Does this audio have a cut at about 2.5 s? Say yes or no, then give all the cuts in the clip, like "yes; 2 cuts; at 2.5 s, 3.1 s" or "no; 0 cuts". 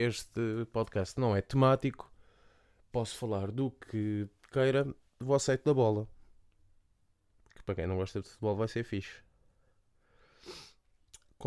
no; 0 cuts